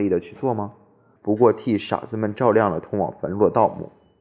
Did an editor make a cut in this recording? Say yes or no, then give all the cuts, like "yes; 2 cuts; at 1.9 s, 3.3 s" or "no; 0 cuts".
yes; 1 cut; at 1.2 s